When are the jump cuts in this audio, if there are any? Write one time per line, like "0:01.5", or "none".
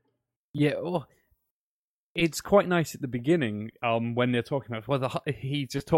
none